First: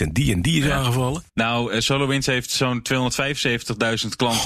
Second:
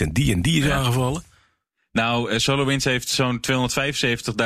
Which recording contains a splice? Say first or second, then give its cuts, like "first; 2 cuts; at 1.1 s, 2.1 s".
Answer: first; 1 cut; at 1.3 s